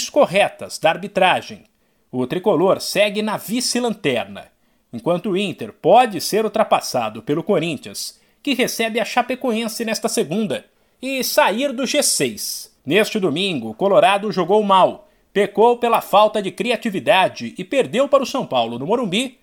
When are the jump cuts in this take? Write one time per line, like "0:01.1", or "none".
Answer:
0:12.8